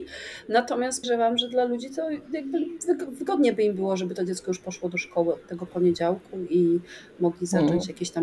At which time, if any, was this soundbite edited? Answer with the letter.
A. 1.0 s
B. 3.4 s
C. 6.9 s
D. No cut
A